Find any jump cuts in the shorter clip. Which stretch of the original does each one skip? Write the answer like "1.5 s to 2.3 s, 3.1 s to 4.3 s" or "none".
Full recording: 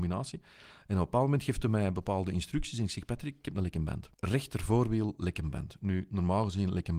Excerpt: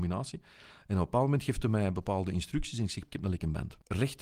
3.1 s to 3.4 s